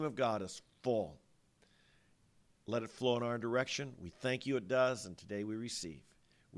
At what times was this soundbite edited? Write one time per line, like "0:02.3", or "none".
none